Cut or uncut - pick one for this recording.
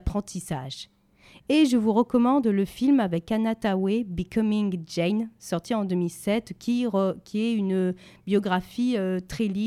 uncut